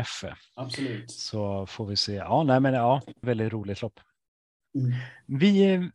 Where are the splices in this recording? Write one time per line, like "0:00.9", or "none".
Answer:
0:03.2